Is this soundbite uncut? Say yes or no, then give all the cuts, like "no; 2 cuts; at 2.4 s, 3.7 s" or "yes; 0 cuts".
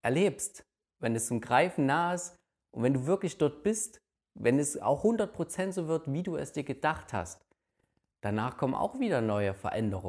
yes; 0 cuts